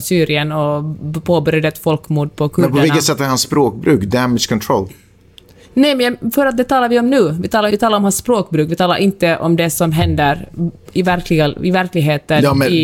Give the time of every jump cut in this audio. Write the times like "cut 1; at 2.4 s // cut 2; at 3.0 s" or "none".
cut 1; at 7.7 s